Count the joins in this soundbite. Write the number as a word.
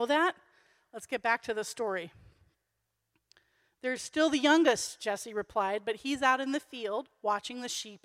zero